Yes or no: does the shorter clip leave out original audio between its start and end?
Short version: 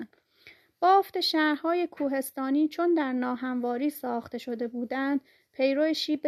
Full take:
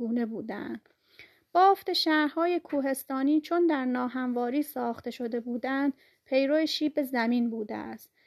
no